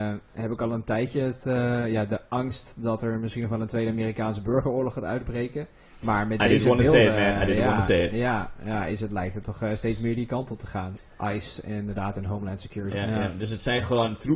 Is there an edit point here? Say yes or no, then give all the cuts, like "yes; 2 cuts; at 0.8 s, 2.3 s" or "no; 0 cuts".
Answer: yes; 2 cuts; at 11.0 s, 12.9 s